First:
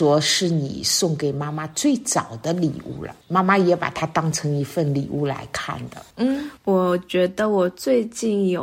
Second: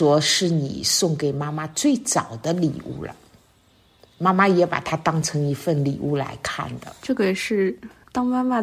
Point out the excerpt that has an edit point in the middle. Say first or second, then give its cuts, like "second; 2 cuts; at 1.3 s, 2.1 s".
first; 2 cuts; at 3.2 s, 6.1 s